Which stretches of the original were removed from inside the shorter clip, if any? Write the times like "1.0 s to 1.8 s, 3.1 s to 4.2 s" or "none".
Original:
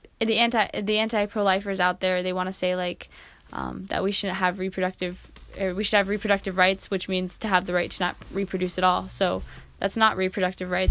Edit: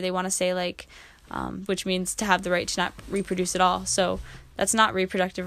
3.9 s to 6.9 s